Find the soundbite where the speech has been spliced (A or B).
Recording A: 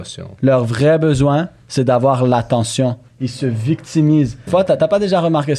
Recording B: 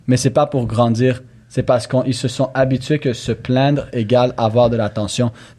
A